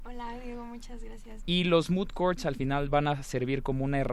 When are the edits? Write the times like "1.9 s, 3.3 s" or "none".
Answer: 1.4 s